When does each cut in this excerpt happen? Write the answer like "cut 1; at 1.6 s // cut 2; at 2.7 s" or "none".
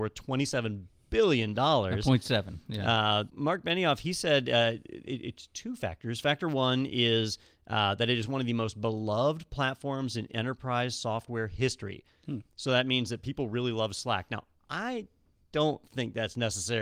cut 1; at 3.3 s